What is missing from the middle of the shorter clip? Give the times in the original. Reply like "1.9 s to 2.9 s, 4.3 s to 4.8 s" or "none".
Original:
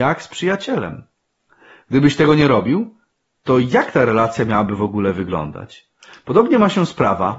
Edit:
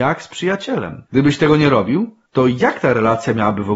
1.1 s to 1.8 s, 3.0 s to 3.4 s